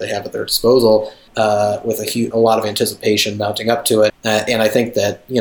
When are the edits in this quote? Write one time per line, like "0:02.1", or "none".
0:01.3
0:02.3
0:04.1